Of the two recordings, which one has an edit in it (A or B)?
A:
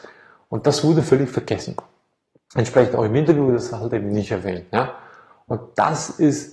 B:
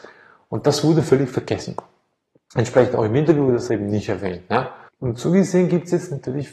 B